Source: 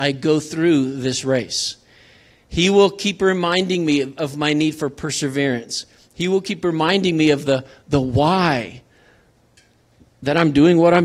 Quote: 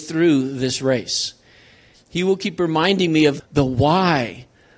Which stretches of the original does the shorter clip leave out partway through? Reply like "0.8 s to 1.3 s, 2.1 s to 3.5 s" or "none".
2.4 s to 6.0 s, 7.4 s to 7.8 s